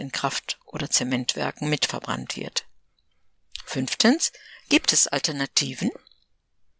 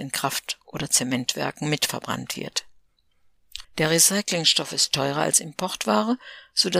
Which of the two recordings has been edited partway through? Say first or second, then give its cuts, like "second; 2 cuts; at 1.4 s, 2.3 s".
second; 1 cut; at 3.6 s